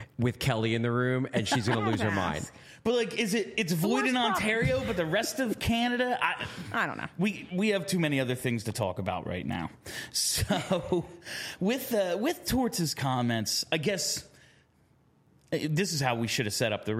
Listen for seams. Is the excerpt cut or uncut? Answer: uncut